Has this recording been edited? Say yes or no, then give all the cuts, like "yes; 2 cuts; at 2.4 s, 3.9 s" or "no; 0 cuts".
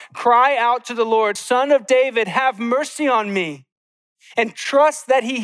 no; 0 cuts